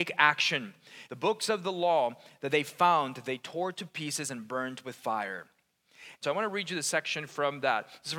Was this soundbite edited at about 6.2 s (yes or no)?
yes